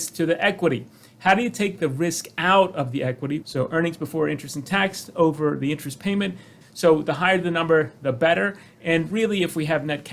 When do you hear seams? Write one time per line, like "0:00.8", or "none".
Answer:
0:03.4
0:06.6

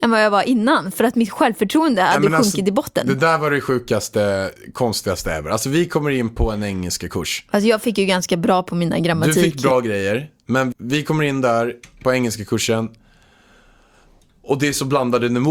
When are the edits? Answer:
0:10.7

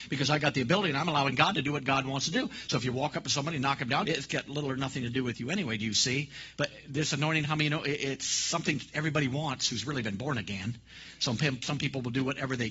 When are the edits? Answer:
0:04.0

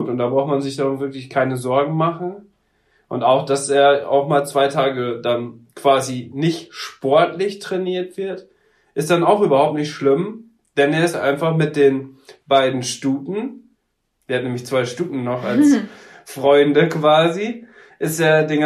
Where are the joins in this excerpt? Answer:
none

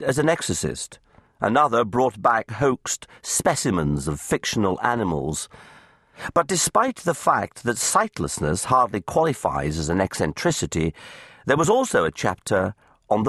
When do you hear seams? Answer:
none

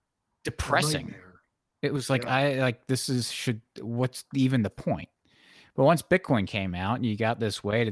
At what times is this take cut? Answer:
none

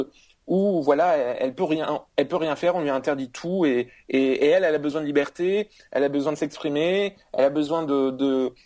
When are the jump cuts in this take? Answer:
none

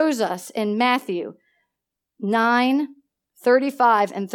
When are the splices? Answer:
none

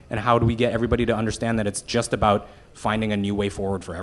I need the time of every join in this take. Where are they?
none

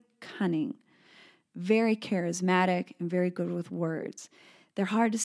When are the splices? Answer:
none

